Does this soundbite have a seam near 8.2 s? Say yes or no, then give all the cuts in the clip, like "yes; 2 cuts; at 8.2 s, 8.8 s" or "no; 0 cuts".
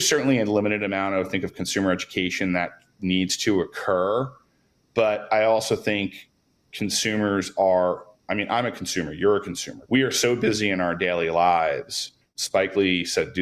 no; 2 cuts; at 9.9 s, 12.2 s